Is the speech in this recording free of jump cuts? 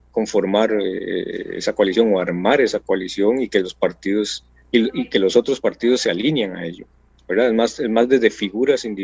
yes; 0 cuts

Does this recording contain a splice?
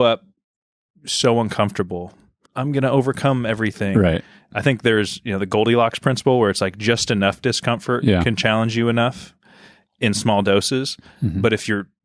yes; 1 cut; at 2.5 s

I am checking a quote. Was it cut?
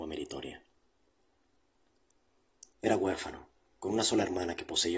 yes; 1 cut; at 2.7 s

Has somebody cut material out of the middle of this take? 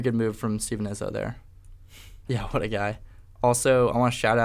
yes; 1 cut; at 2.3 s

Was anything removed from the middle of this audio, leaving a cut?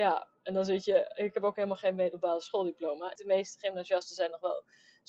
yes; 1 cut; at 3.2 s

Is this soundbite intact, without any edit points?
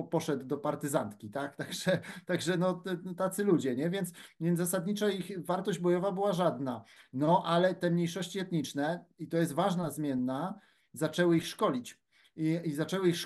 yes; 0 cuts

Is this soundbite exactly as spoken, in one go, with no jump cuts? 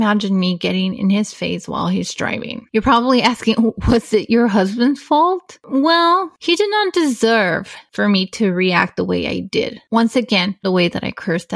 no; 1 cut; at 10.6 s

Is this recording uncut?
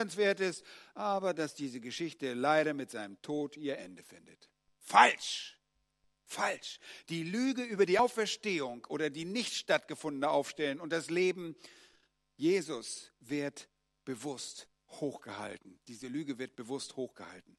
yes; 0 cuts

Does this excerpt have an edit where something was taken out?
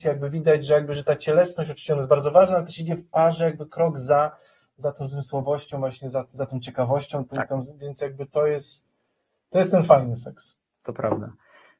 no; 0 cuts

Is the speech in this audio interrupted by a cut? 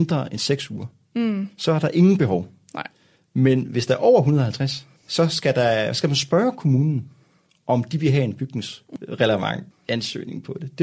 no; 0 cuts

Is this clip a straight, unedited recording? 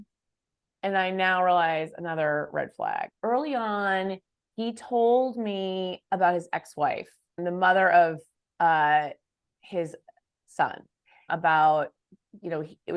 no; 2 cuts; at 7.4 s, 11.3 s

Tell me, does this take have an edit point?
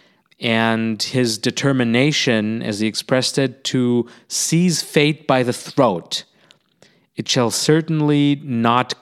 no; 0 cuts

